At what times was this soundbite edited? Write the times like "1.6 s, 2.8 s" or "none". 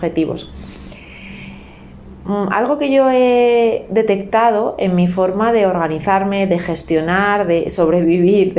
none

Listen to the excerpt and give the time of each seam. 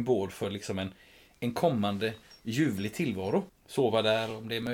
3.5 s

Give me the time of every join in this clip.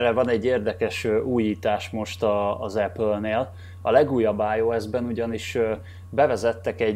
none

